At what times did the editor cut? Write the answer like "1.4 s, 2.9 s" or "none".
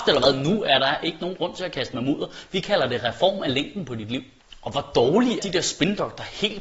5.4 s